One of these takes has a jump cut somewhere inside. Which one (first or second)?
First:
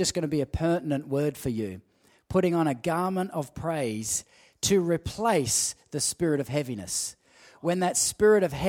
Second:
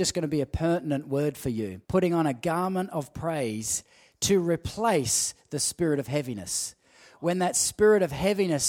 second